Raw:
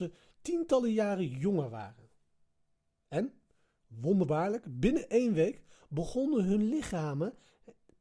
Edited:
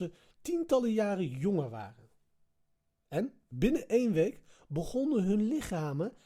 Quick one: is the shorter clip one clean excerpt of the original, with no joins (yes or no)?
no